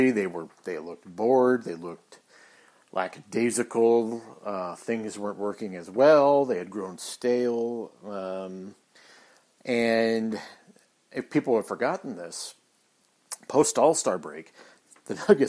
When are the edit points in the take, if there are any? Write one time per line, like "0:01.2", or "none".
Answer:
none